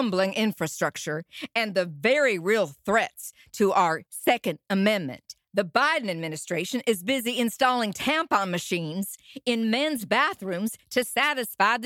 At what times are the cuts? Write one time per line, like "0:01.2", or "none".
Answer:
0:05.5